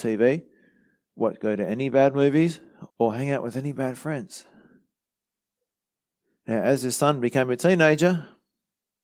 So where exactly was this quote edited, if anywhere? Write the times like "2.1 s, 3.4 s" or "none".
2.9 s